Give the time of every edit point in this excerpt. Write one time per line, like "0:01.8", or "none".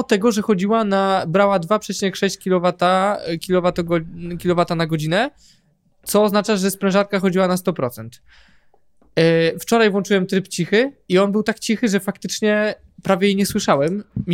none